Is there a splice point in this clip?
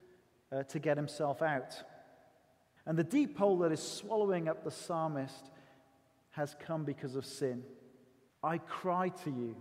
yes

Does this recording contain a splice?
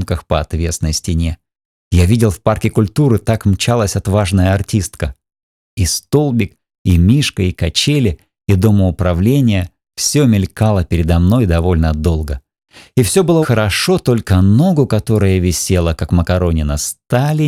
yes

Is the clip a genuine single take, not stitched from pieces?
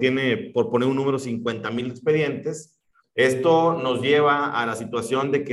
no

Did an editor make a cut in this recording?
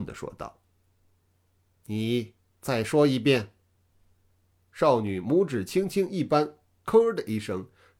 yes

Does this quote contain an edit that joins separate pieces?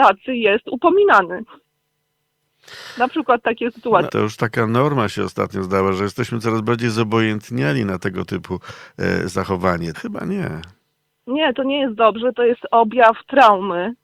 yes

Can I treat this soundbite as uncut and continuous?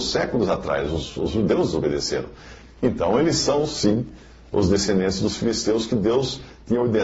no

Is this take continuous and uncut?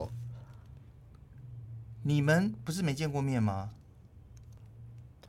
yes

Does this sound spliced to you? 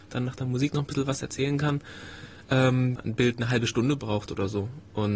yes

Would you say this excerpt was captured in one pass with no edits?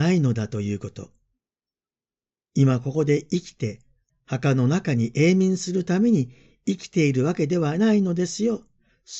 no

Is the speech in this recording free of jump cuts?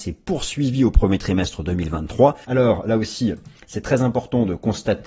no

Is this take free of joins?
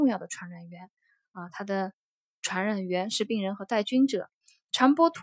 yes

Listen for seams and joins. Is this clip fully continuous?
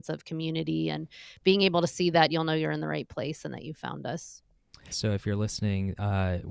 no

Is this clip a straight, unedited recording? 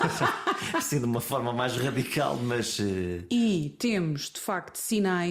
yes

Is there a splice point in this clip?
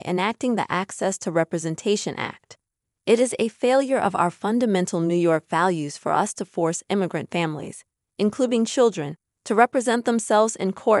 no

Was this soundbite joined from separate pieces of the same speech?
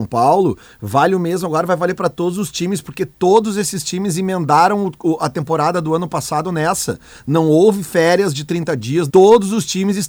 yes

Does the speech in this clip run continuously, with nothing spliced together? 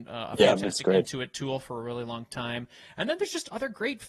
yes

